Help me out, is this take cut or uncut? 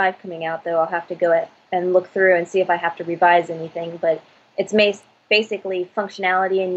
uncut